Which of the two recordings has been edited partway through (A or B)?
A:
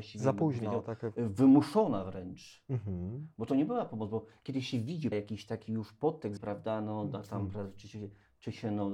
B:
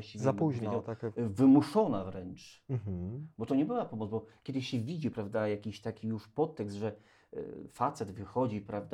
A